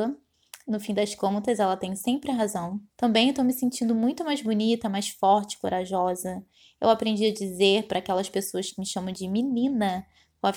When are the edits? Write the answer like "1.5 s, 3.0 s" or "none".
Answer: 2.9 s

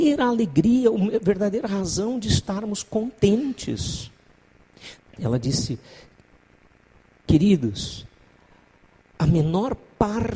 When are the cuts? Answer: 5.0 s

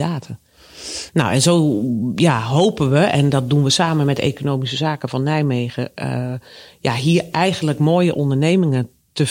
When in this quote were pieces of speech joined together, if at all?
1.1 s

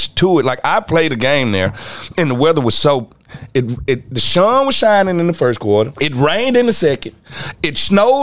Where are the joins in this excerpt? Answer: 5.9 s

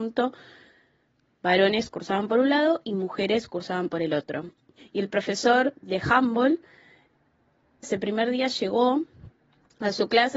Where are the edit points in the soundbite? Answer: 4.8 s, 7.8 s

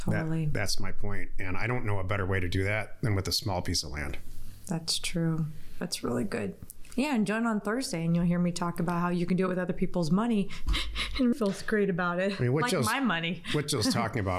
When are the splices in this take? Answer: 11.3 s

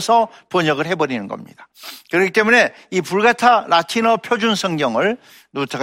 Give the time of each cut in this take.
none

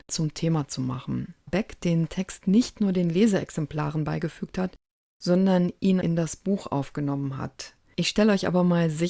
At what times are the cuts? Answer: 1.5 s

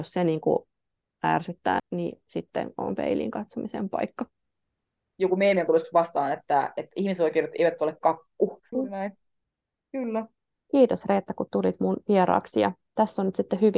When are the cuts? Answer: 1.8 s, 8.7 s

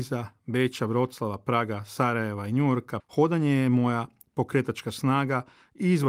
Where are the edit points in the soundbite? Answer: 3.0 s

